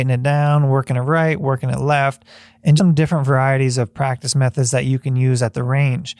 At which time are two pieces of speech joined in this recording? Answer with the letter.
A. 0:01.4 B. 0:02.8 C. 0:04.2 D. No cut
B